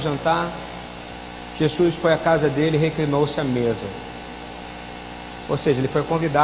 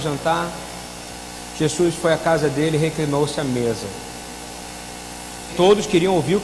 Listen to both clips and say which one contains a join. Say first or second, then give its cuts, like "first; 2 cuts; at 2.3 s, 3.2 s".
second; 1 cut; at 5.5 s